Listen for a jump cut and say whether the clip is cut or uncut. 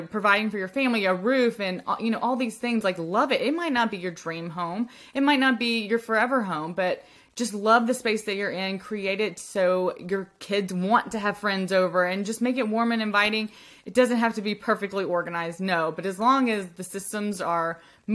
uncut